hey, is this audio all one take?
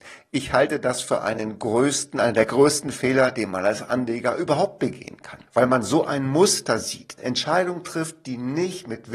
no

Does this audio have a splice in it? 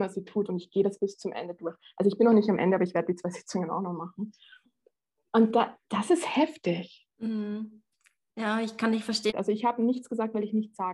yes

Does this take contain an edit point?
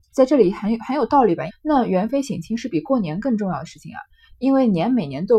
yes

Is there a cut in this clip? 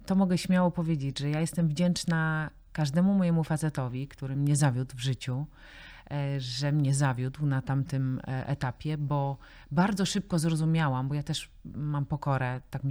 no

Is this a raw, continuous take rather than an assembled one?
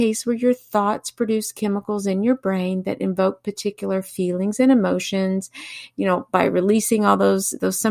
yes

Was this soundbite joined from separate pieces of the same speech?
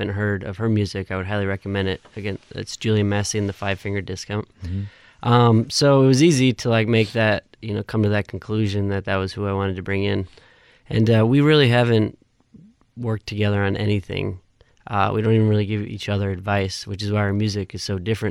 no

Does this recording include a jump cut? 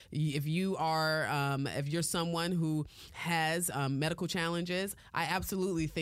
no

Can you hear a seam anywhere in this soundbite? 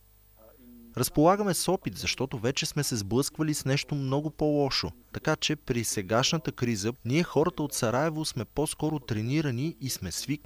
yes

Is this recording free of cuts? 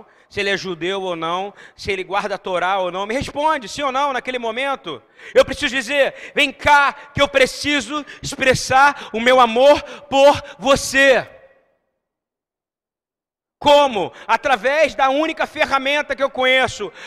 yes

